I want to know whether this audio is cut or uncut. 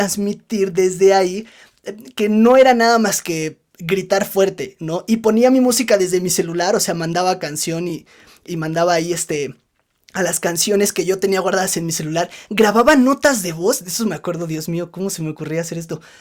uncut